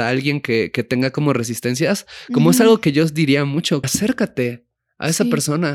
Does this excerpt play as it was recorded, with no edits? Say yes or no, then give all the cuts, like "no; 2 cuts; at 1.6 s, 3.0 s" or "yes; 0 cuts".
no; 1 cut; at 3.8 s